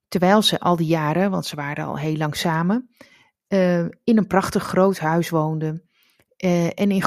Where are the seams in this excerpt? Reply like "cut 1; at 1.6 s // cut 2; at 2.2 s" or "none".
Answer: none

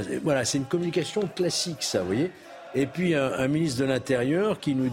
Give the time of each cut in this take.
none

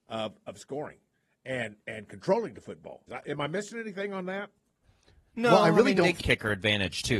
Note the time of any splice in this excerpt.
cut 1; at 3.1 s // cut 2; at 6.2 s

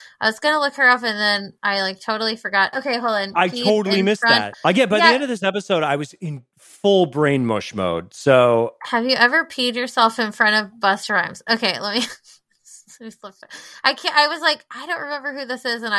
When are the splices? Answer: cut 1; at 2.7 s // cut 2; at 4.5 s

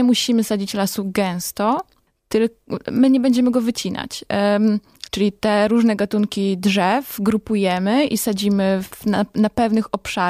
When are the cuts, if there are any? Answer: cut 1; at 5.1 s

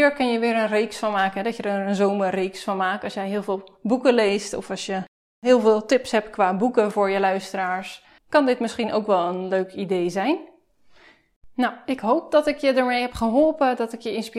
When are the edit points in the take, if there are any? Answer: cut 1; at 8.2 s

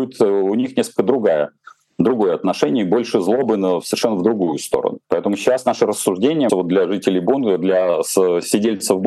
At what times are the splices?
cut 1; at 5.0 s // cut 2; at 6.5 s

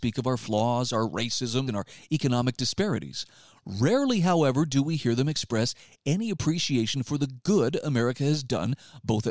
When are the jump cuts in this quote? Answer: cut 1; at 1.7 s

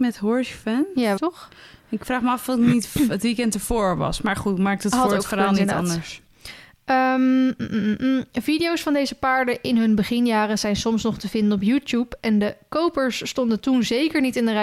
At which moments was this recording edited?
cut 1; at 1.2 s

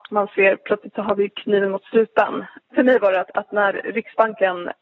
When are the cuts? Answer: none

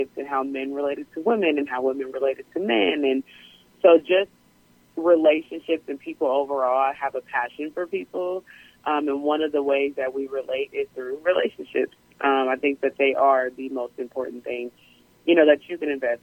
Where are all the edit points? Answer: none

